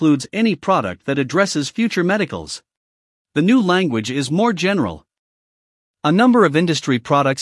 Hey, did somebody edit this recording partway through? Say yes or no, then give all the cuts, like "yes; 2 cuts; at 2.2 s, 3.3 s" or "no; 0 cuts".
yes; 1 cut; at 3.2 s